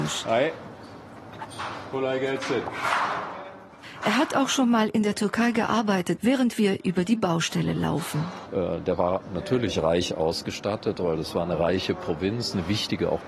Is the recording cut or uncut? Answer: cut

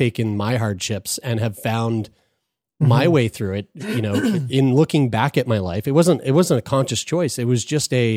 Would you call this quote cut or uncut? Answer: uncut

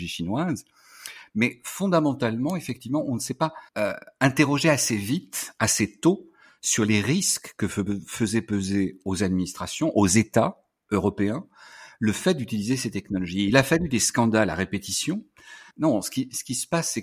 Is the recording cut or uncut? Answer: cut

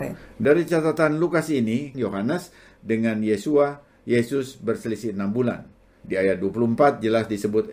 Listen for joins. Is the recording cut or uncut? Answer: cut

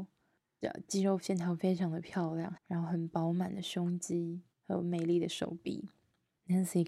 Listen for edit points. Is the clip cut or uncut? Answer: cut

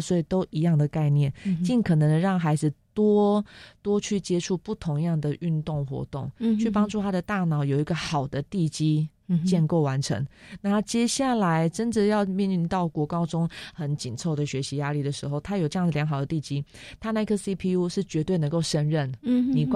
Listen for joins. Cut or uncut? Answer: uncut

